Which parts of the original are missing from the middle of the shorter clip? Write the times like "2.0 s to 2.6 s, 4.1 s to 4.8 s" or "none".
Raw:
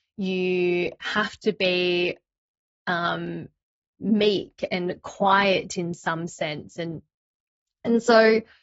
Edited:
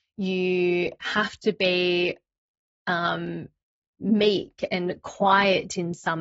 none